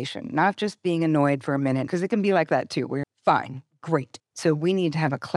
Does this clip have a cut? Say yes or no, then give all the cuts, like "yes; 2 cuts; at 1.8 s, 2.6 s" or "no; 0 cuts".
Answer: yes; 3 cuts; at 1.9 s, 3.0 s, 4.2 s